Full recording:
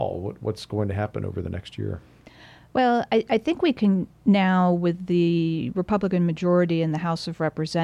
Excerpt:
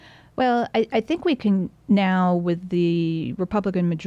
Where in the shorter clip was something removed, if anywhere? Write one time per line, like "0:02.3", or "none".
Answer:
none